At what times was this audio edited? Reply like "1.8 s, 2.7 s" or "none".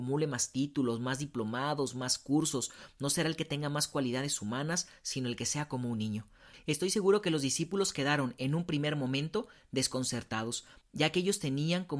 none